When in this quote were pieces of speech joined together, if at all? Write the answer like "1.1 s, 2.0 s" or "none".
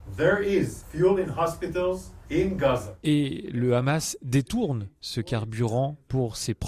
none